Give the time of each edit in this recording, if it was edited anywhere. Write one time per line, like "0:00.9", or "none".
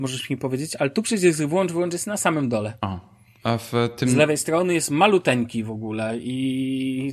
none